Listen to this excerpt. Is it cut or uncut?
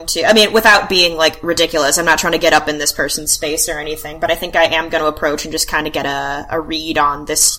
uncut